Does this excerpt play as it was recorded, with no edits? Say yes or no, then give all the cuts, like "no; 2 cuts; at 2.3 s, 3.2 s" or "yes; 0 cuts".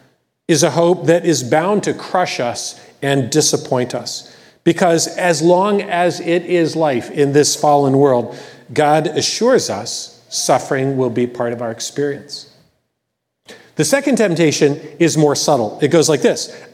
yes; 0 cuts